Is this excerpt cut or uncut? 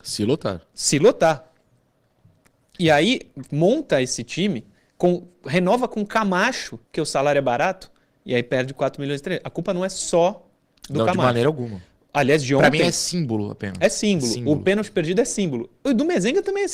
cut